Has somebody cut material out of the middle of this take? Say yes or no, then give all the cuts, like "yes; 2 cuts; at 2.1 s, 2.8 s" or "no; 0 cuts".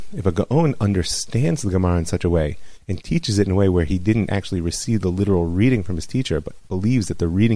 no; 0 cuts